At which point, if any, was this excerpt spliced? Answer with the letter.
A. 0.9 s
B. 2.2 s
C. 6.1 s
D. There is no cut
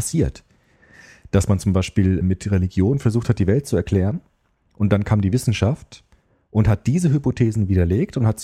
B